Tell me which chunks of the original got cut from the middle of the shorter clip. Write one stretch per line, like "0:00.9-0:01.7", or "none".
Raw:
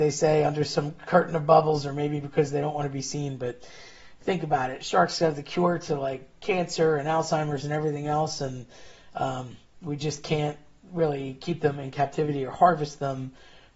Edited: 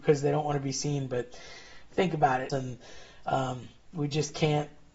0:04.8-0:08.4